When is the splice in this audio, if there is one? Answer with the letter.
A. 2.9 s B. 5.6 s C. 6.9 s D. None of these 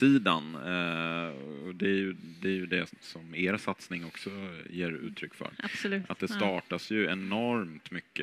A